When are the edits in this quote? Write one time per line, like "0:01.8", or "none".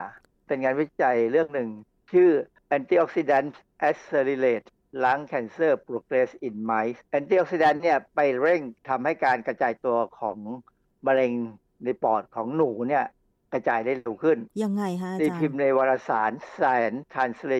0:07.1